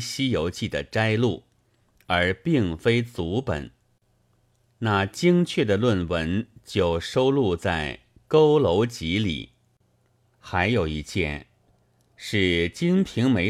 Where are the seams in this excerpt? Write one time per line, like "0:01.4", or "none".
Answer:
0:04.7

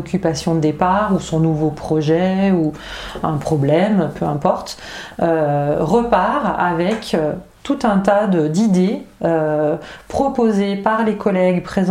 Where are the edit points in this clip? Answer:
none

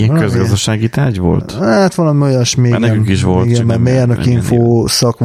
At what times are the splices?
none

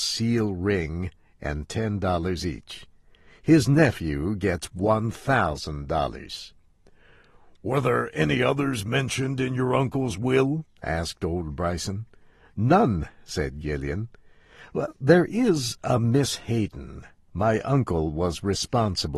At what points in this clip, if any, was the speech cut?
none

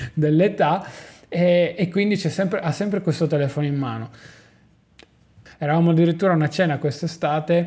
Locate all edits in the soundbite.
0:05.5

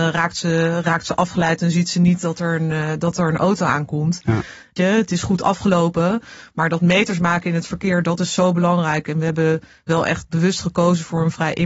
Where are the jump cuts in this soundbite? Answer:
0:04.8

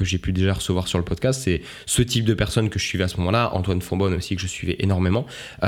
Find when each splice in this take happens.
none

